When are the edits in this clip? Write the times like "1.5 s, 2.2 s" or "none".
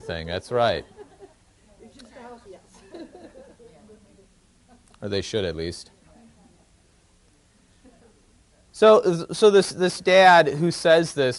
2.5 s

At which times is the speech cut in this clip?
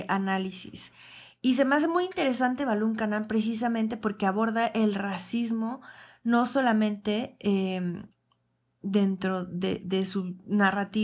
none

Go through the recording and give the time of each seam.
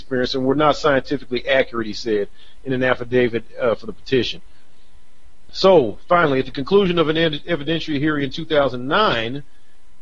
5.5 s

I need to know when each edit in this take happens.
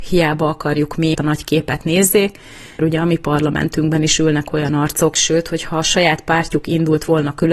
1.1 s, 2.8 s, 5.1 s

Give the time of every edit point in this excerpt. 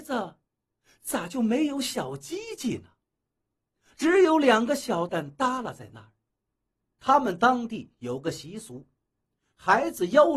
5.1 s, 6.9 s

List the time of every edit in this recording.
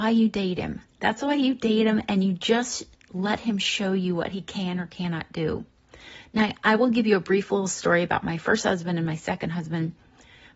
none

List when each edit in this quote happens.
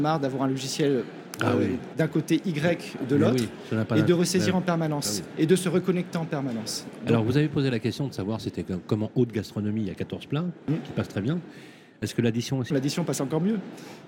1.9 s, 12.7 s

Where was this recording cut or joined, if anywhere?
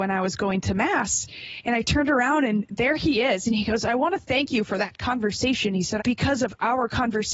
6.0 s

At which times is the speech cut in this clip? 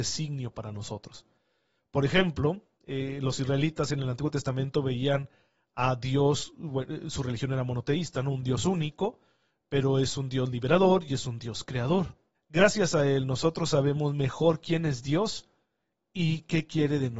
12.3 s

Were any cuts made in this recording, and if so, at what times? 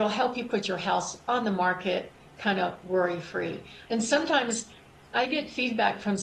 3.9 s

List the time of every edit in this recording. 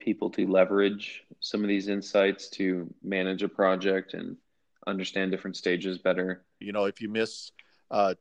6.6 s

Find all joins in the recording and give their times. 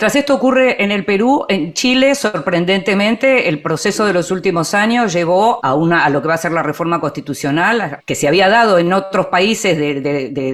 5.6 s, 8.0 s

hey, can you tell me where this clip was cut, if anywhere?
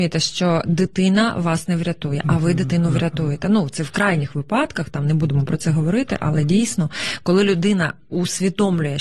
none

